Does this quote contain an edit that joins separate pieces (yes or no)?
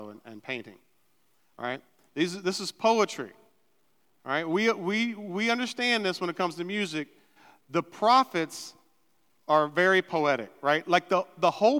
no